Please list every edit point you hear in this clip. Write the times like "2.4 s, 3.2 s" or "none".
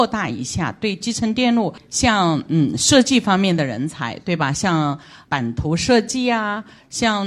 none